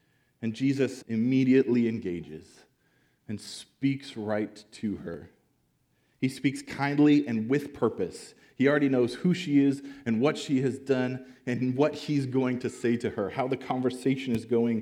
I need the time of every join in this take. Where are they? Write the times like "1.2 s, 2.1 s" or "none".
1.0 s